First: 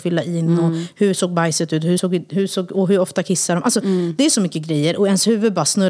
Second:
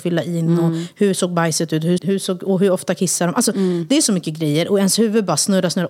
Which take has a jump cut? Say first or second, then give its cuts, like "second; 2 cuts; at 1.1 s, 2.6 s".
second; 1 cut; at 2.0 s